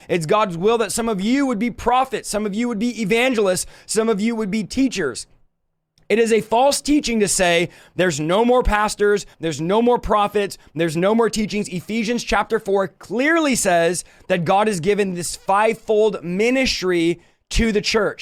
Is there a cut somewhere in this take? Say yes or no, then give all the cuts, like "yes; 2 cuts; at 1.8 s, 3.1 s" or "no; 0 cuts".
yes; 1 cut; at 9.3 s